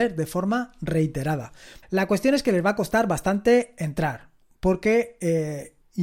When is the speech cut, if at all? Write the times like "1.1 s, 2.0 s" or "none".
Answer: 1.8 s